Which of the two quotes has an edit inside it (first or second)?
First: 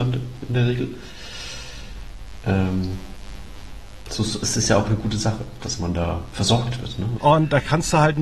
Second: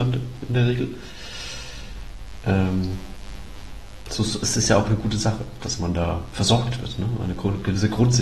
first